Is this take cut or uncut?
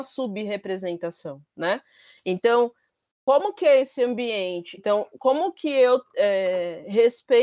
cut